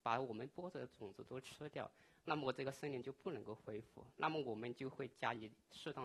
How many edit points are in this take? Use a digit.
0